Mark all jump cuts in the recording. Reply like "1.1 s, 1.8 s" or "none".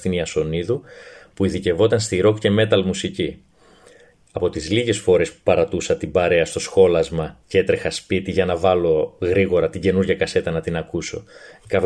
none

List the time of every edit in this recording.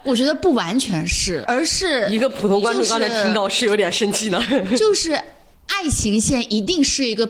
1.5 s

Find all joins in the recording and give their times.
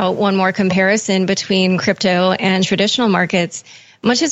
none

